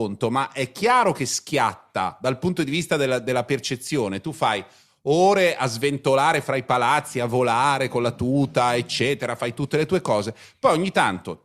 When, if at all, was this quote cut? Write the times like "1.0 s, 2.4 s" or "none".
none